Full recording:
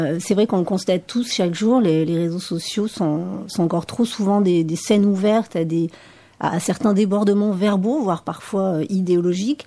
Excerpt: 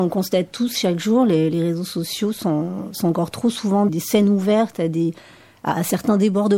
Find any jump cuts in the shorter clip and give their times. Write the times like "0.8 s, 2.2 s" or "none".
3.9 s